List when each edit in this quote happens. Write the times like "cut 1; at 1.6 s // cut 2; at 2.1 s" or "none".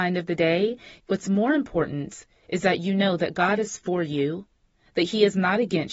cut 1; at 1.0 s